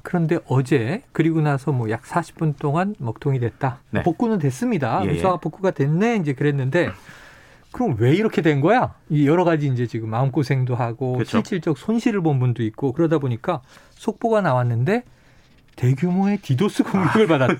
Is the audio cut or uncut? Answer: uncut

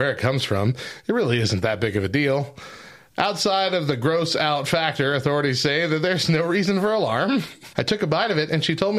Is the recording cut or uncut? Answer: cut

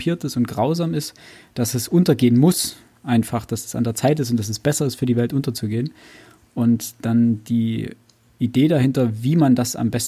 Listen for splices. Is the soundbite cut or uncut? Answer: uncut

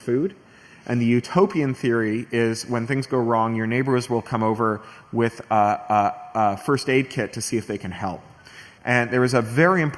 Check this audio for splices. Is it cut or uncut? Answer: cut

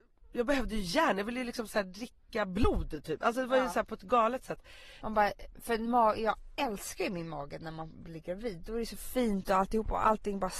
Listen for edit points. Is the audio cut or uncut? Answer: cut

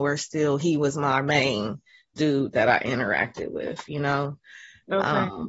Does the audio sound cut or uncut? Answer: uncut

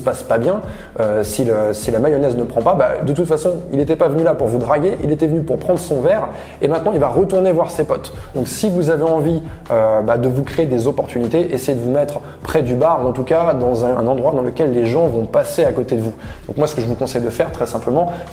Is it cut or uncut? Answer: cut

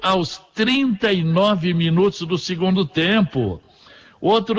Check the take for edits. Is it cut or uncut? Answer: uncut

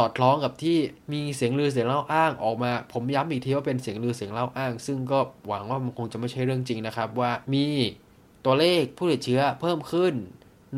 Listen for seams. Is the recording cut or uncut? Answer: cut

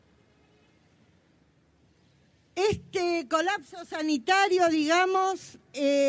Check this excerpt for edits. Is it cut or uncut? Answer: uncut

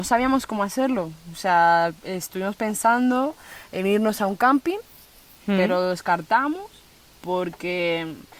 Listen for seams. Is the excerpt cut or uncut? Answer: uncut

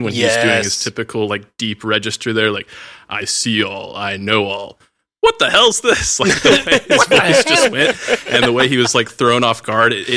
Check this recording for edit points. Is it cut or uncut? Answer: uncut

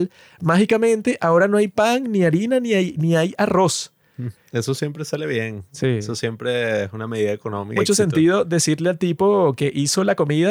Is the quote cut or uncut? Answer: cut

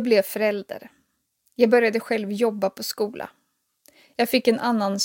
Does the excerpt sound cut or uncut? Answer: uncut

